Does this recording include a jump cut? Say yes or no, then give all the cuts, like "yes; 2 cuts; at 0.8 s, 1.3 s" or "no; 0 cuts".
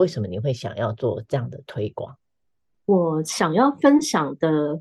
no; 0 cuts